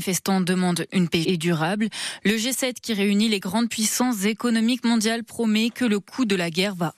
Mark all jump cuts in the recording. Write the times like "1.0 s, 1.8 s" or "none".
1.2 s